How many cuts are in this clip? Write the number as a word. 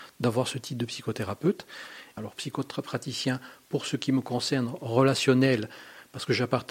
one